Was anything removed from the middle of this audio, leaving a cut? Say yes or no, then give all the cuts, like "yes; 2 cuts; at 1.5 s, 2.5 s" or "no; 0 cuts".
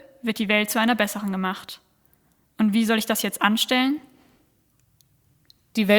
no; 0 cuts